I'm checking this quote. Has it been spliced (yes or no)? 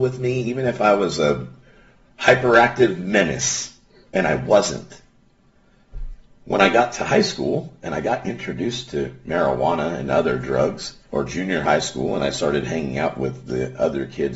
yes